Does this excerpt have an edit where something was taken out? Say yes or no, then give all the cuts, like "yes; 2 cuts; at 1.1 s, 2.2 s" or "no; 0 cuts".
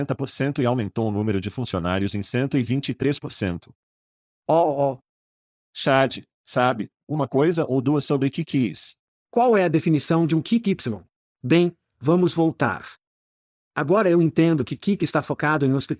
yes; 3 cuts; at 9.2 s, 11.2 s, 13.6 s